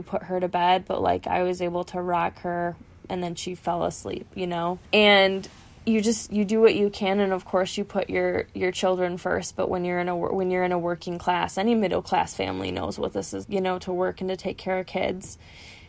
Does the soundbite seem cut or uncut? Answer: cut